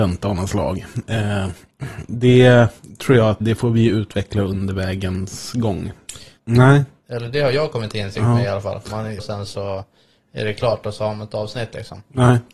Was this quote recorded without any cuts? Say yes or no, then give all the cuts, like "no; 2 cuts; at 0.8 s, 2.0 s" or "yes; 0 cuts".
no; 3 cuts; at 3.4 s, 6.4 s, 9.2 s